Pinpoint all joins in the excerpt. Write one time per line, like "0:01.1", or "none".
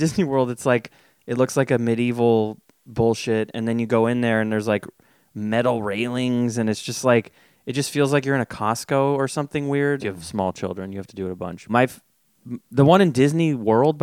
0:10.0
0:11.7